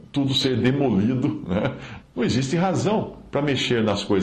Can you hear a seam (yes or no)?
yes